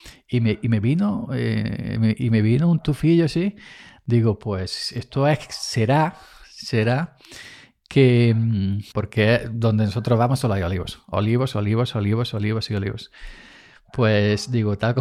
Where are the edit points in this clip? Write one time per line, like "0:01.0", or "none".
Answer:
0:08.9
0:11.5

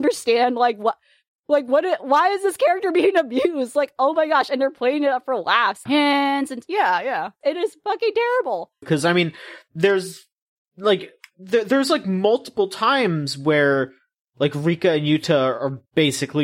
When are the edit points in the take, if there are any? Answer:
0:05.9
0:07.4
0:08.8

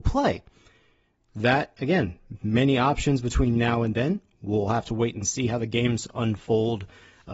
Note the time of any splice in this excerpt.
none

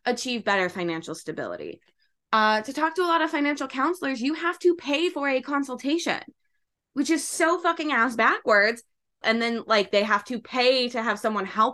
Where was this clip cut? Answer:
0:09.2

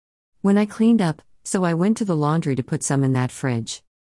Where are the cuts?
0:01.3

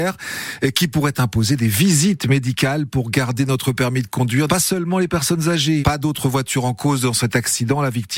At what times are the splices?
0:04.5
0:05.8

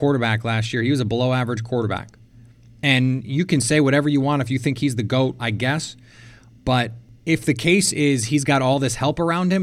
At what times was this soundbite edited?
0:05.4

